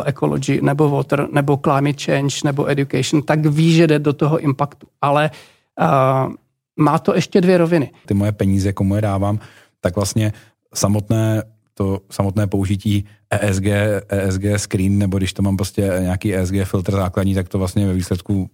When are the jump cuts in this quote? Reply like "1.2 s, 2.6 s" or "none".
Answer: 8.0 s